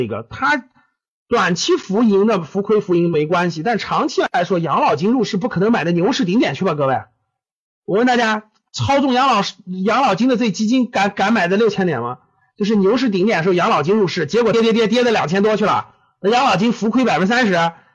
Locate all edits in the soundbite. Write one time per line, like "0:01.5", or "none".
0:14.5